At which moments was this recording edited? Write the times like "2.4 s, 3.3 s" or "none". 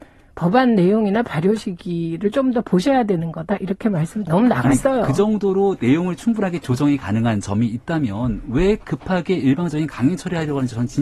4.3 s